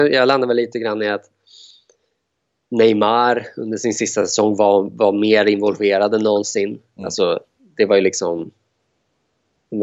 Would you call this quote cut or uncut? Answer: uncut